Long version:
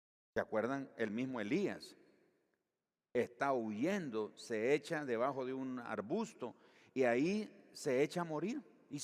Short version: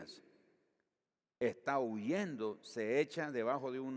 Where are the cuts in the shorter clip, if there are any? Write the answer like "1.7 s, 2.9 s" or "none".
none